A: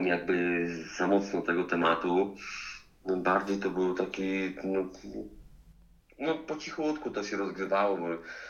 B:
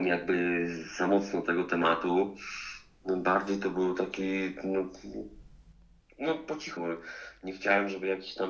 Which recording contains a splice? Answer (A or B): B